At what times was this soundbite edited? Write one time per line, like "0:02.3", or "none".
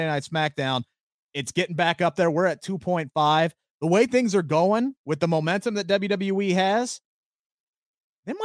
0:01.1